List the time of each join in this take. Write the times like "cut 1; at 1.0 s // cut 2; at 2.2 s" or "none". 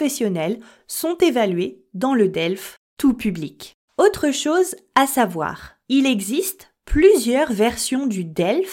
cut 1; at 3.9 s